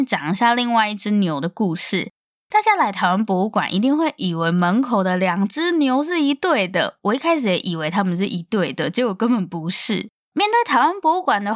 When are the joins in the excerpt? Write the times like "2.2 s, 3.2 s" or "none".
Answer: 10.3 s

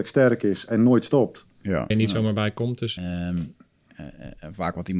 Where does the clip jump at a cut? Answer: 1.9 s, 3.0 s

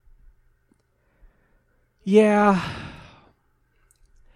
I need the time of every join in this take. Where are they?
none

